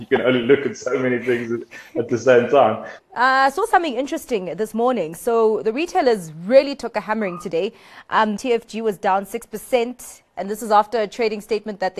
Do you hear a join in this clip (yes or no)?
yes